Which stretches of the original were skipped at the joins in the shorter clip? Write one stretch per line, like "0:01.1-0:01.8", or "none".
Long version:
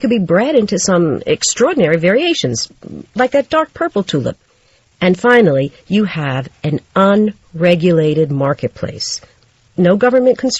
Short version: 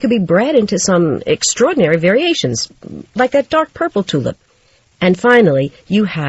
none